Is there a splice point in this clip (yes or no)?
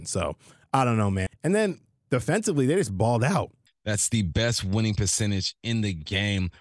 yes